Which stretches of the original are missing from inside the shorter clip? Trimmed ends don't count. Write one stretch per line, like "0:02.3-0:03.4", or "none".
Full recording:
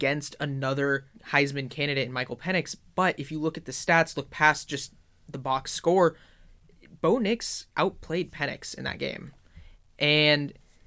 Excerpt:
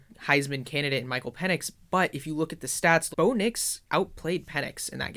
0:04.2-0:07.0